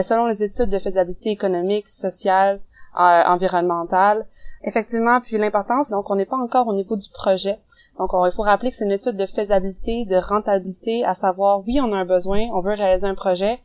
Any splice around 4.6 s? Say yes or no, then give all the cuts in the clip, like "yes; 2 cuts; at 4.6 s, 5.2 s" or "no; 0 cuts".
yes; 2 cuts; at 4.6 s, 5.9 s